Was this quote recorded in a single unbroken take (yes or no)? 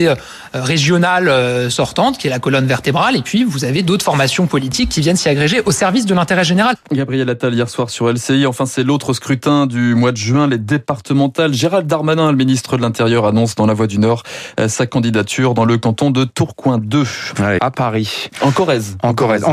no